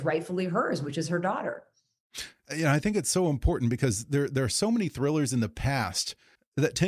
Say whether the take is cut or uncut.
uncut